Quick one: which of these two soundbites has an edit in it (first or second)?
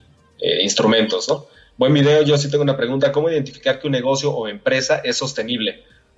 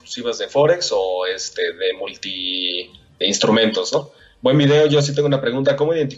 second